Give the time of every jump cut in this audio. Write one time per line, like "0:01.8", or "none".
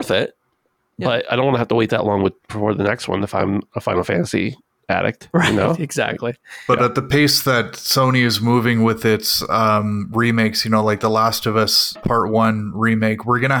0:12.0